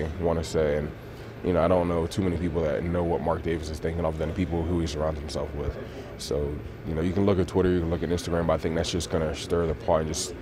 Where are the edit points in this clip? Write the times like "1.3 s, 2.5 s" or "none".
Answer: none